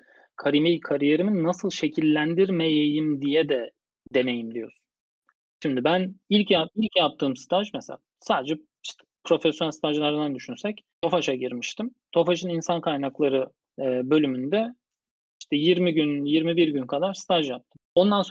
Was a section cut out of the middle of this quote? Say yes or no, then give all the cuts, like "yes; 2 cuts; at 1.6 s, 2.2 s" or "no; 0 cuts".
yes; 1 cut; at 10.9 s